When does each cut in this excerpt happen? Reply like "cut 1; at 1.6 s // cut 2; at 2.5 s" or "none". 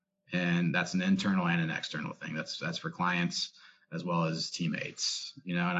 none